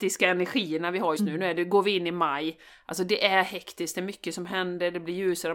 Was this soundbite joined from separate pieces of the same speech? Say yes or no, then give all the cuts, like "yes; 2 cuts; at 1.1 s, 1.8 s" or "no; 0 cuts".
yes; 1 cut; at 1.2 s